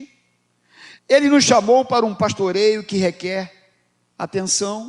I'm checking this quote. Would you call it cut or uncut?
cut